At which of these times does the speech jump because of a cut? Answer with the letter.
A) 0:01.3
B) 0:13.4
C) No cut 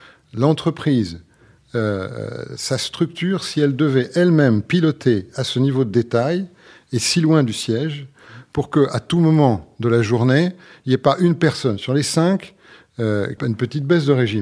B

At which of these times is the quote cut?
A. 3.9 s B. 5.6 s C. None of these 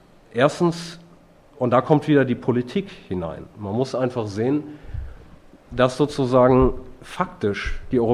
C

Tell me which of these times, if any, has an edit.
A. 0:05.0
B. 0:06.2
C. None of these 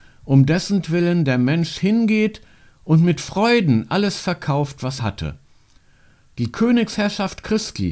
A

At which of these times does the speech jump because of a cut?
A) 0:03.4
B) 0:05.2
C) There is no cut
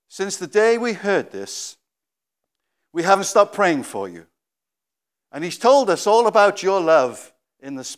B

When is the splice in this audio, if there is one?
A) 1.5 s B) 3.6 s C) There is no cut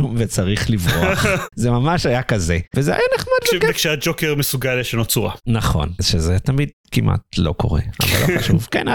C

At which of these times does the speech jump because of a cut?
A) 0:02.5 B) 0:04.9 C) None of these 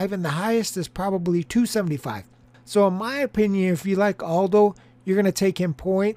A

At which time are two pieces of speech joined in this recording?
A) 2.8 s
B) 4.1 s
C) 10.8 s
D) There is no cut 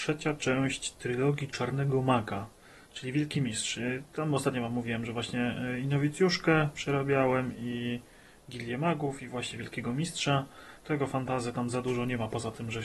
C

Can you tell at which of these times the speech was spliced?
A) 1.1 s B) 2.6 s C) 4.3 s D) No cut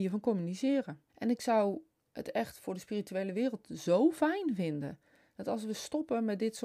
A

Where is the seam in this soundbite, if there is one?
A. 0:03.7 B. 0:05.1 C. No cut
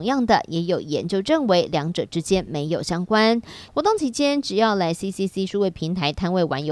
A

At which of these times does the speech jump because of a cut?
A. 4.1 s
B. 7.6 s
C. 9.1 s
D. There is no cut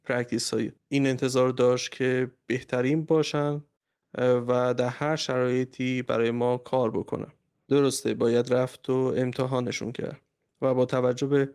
B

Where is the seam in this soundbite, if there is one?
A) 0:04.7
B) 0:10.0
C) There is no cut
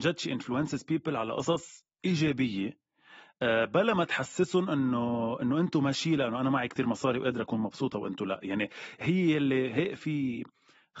B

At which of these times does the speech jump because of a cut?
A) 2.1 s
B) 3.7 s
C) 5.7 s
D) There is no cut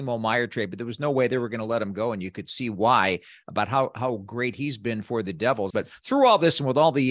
C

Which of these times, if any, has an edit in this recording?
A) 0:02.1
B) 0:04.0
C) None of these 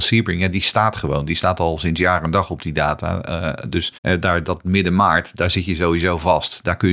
B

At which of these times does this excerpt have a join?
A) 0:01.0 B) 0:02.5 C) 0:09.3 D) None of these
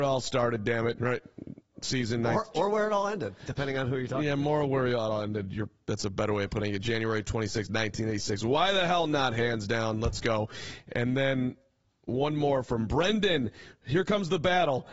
A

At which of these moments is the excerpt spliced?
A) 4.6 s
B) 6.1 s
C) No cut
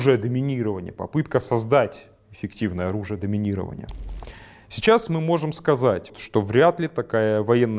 B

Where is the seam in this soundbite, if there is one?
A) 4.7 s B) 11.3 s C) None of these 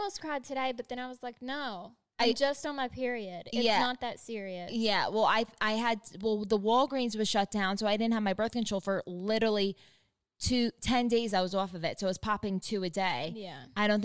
C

